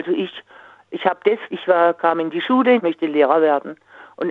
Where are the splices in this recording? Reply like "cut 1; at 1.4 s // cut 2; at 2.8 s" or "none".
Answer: cut 1; at 1.5 s // cut 2; at 2.8 s